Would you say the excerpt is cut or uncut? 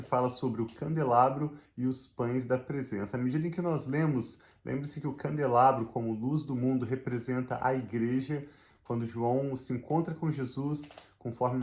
uncut